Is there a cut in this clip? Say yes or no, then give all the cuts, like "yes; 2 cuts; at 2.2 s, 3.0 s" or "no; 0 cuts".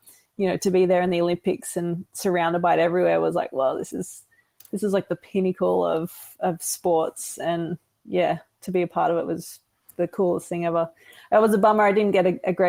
no; 0 cuts